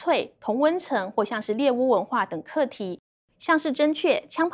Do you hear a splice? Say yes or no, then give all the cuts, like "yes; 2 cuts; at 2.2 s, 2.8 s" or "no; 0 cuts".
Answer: yes; 1 cut; at 3.3 s